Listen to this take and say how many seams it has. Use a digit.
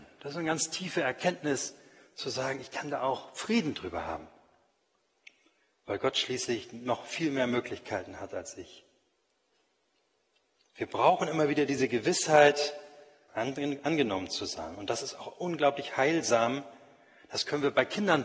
1